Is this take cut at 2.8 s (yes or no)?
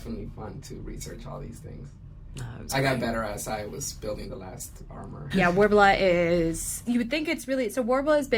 no